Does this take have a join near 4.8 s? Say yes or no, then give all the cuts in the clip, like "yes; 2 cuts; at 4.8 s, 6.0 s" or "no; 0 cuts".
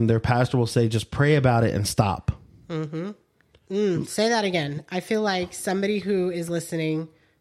no; 1 cut; at 3.6 s